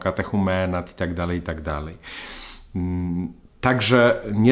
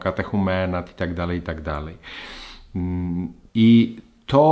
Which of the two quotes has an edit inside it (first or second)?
second